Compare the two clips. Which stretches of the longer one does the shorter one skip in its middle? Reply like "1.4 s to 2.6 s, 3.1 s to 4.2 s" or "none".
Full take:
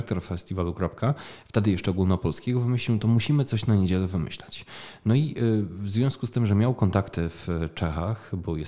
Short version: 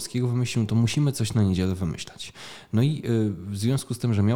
none